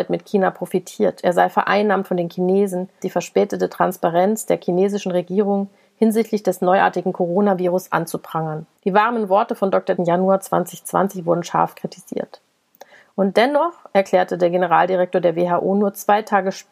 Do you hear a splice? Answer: yes; 3 cuts; at 3.0 s, 8.8 s, 10.0 s

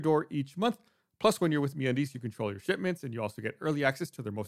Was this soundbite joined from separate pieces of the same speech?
yes; 1 cut; at 2.1 s

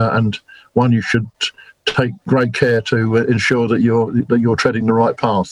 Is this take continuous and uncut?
yes; 0 cuts

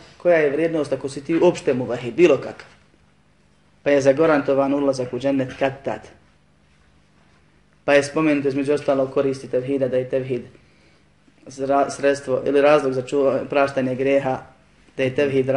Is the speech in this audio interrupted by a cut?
no; 0 cuts

